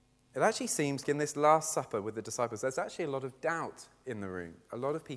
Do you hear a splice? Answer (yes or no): yes